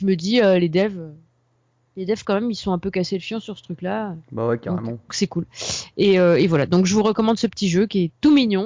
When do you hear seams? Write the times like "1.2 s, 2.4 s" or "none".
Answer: 5.1 s